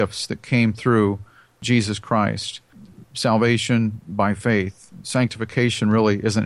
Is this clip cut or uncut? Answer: uncut